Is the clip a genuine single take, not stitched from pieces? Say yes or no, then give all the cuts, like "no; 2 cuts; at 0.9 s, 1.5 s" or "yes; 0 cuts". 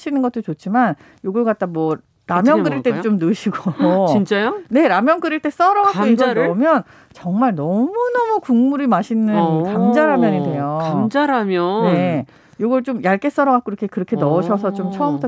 yes; 0 cuts